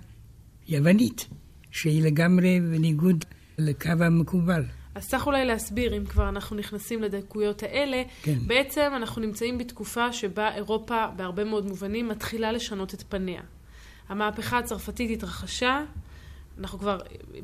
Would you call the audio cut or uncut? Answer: uncut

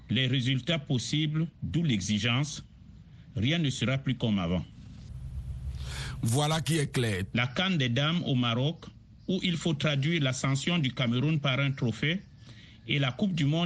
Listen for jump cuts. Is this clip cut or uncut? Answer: cut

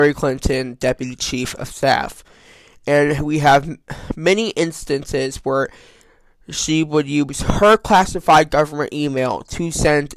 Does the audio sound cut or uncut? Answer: uncut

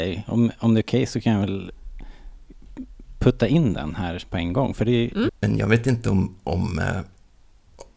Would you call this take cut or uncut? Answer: cut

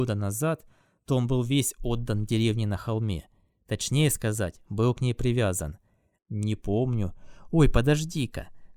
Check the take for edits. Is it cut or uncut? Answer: cut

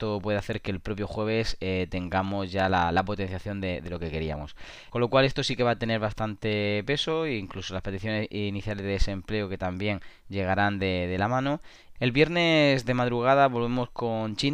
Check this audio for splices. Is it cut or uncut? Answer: cut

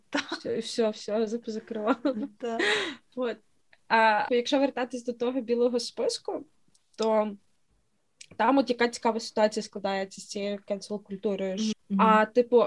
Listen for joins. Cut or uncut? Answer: cut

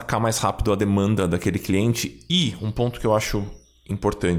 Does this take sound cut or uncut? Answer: uncut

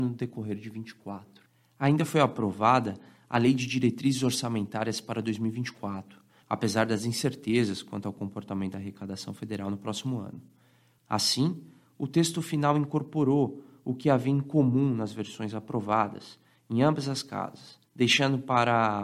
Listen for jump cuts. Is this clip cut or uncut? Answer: cut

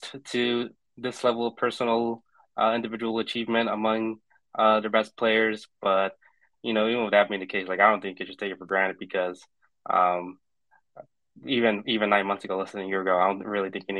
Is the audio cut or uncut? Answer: uncut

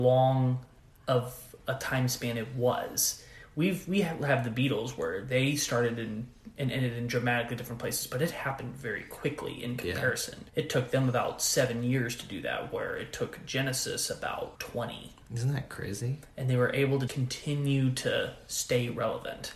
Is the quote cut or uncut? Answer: cut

